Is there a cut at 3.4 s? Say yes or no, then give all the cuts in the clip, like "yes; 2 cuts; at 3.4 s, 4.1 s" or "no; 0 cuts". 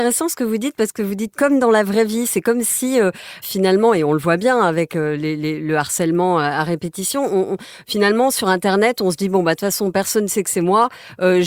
yes; 1 cut; at 3.4 s